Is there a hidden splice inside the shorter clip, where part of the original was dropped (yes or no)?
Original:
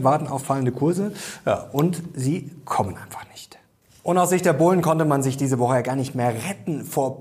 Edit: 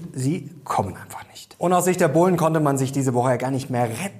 yes